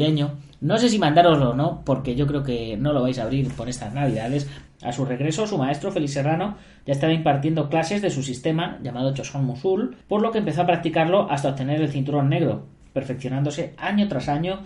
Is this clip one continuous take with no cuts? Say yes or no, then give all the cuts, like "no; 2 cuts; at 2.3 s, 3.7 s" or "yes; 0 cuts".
no; 2 cuts; at 4.7 s, 10.0 s